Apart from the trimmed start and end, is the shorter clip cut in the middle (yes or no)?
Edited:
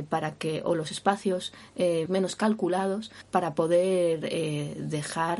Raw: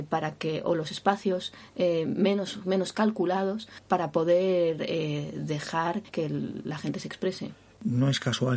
yes